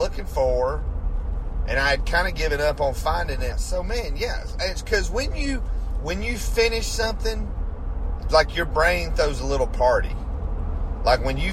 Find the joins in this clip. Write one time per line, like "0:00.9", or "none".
0:03.5